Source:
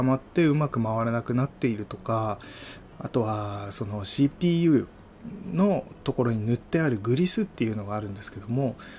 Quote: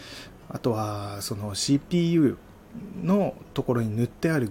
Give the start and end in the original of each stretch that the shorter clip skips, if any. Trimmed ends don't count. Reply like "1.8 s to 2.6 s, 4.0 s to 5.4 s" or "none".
none